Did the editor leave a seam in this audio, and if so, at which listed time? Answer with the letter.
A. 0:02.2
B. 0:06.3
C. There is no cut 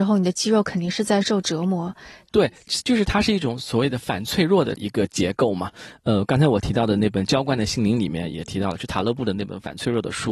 A